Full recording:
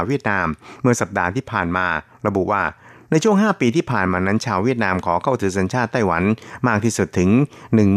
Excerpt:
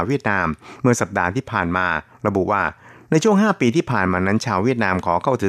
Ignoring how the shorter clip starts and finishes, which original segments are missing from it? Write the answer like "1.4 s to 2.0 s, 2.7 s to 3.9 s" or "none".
none